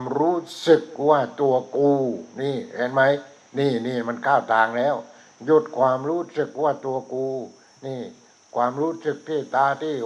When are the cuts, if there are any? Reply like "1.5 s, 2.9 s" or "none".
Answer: none